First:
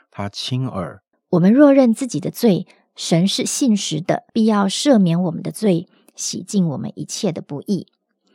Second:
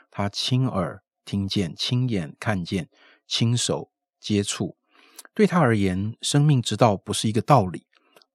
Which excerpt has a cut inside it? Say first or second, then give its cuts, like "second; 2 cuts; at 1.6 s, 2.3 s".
first; 2 cuts; at 1.1 s, 4.3 s